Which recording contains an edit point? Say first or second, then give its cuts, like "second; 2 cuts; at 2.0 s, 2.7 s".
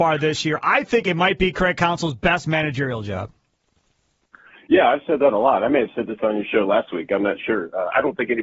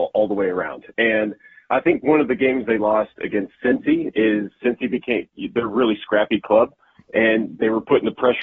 second; 2 cuts; at 4.6 s, 7.0 s